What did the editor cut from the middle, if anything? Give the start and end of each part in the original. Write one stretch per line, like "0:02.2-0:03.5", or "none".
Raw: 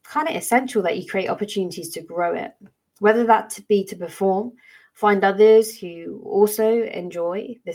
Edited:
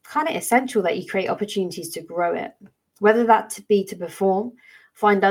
none